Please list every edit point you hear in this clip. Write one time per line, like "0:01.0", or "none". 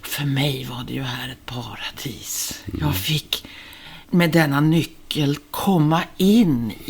0:04.0